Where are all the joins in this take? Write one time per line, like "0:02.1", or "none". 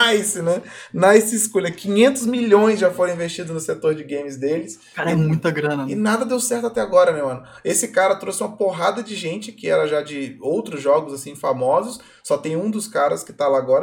none